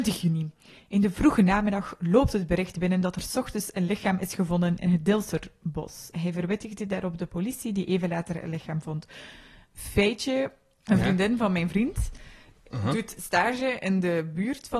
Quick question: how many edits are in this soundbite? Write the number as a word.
two